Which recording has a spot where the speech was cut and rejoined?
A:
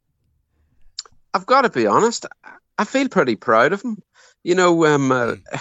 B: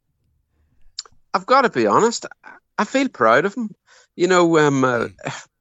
B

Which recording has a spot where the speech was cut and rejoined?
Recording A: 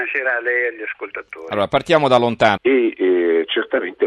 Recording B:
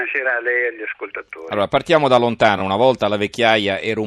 A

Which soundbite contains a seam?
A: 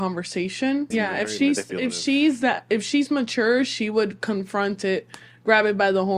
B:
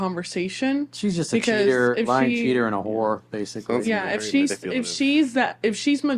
A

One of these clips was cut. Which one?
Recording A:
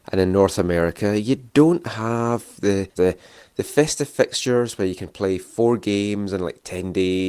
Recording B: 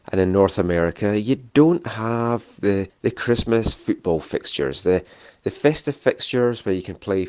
A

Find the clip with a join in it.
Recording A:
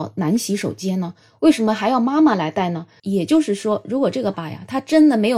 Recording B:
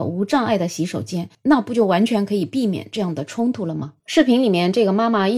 A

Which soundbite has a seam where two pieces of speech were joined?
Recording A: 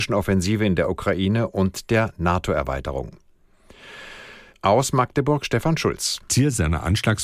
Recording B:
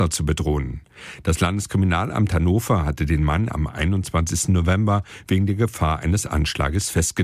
A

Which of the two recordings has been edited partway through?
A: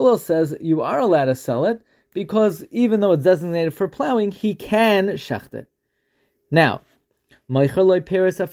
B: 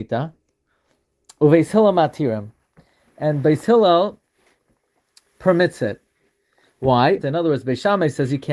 B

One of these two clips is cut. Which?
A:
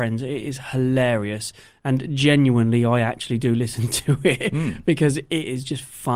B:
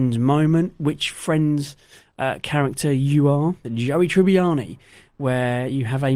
B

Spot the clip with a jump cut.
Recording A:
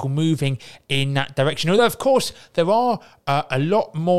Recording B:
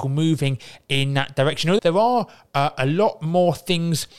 B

